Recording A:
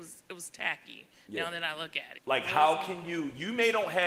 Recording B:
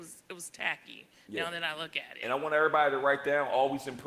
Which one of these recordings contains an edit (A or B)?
A